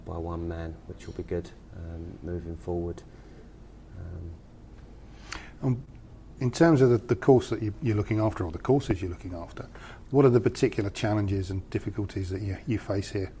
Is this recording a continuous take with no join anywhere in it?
yes; 0 cuts

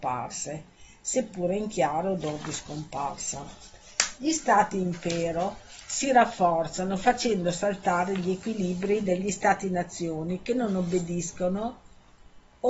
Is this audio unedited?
yes; 0 cuts

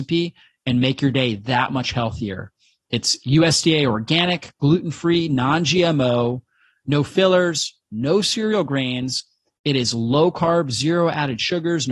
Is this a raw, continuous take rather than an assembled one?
yes; 0 cuts

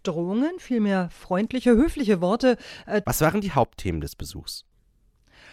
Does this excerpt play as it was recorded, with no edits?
no; 1 cut; at 3.0 s

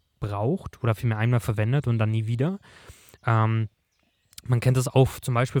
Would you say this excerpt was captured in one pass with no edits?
yes; 0 cuts

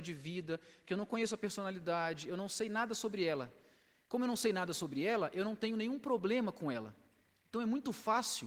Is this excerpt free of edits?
yes; 0 cuts

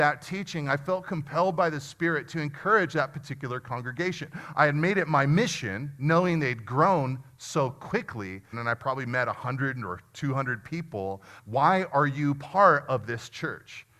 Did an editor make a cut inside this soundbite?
yes; 2 cuts; at 8.5 s, 11.4 s

